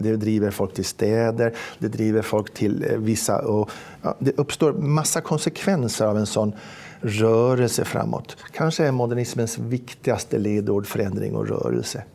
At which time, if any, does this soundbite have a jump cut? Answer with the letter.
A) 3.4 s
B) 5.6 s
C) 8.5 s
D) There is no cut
D